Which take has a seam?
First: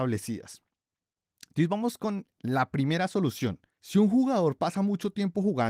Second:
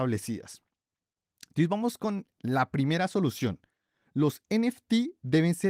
first; 1 cut; at 3.8 s

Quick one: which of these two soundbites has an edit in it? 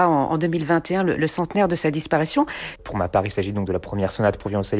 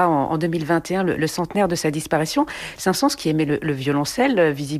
first; 1 cut; at 2.8 s

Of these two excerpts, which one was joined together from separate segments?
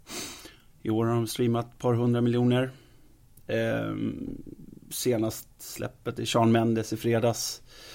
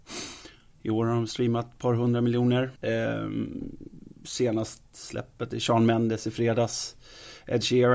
second; 1 cut; at 2.8 s

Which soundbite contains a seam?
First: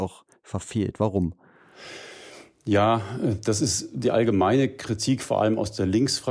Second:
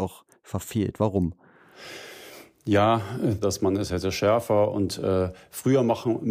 second; 1 cut; at 3.4 s

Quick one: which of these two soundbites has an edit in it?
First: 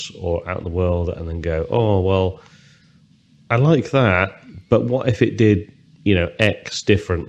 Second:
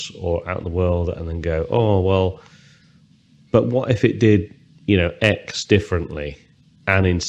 second; 1 cut; at 3.5 s

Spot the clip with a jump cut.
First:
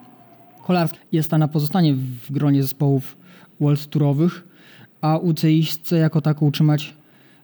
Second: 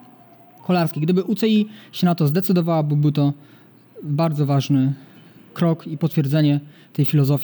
first; 1 cut; at 1.0 s

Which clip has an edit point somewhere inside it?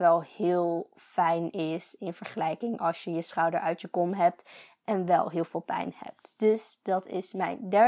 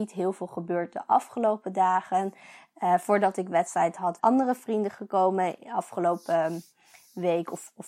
second; 1 cut; at 4.2 s

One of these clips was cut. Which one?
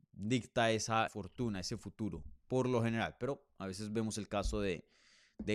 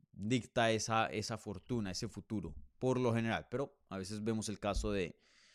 first; 1 cut; at 1.1 s

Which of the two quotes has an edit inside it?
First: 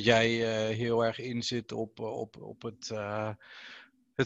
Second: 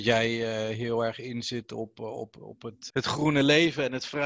second; 1 cut; at 2.9 s

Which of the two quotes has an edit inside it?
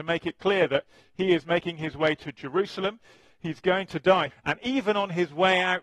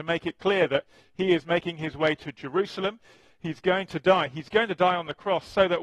first; 1 cut; at 4.3 s

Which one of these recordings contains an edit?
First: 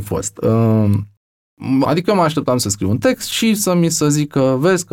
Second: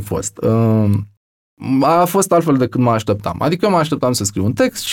first; 1 cut; at 1.8 s

